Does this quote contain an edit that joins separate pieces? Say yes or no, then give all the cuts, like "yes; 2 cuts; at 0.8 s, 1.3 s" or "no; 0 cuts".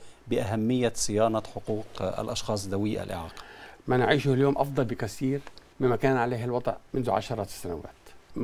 yes; 2 cuts; at 3.8 s, 6.9 s